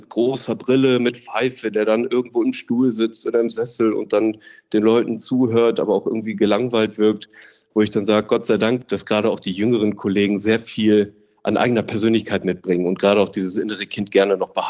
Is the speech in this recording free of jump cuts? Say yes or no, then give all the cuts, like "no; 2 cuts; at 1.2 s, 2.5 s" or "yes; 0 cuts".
yes; 0 cuts